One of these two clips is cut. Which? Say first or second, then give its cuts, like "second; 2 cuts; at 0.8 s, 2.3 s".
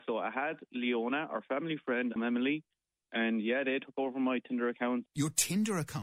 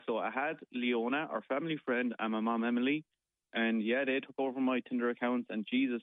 first; 2 cuts; at 2.2 s, 5.1 s